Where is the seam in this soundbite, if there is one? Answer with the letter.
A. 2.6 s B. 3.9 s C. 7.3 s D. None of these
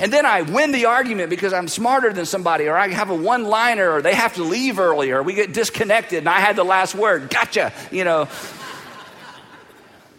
D